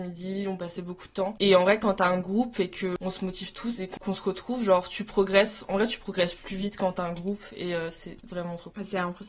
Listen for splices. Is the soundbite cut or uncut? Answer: uncut